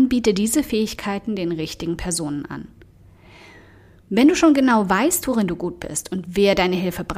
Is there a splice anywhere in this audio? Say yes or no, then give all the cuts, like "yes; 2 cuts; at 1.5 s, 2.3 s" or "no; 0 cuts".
no; 0 cuts